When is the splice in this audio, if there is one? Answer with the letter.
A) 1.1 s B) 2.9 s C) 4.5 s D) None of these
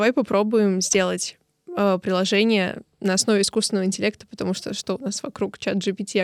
D